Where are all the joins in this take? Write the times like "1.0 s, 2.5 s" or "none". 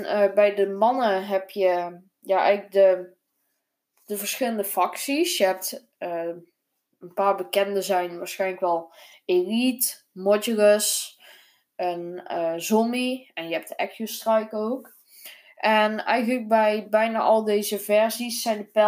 none

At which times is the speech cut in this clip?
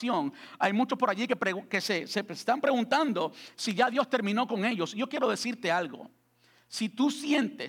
none

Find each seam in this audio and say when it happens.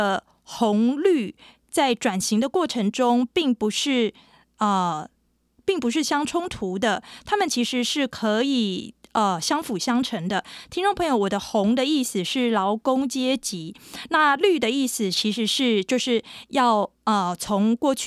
none

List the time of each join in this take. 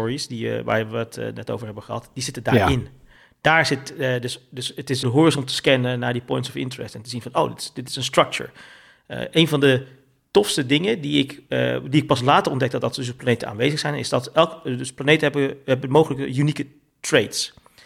5.0 s

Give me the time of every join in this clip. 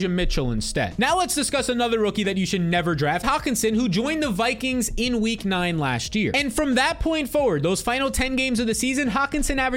3.2 s

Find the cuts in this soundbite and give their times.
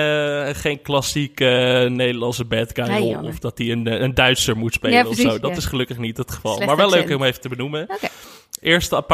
none

